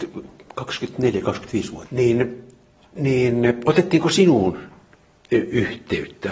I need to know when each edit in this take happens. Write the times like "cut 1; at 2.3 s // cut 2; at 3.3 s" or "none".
cut 1; at 1.9 s